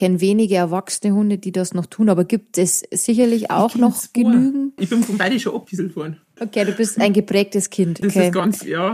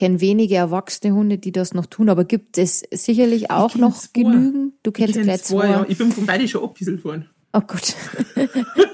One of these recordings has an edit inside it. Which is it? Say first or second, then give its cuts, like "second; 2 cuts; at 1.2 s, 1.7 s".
first; 3 cuts; at 4.8 s, 6.4 s, 8.0 s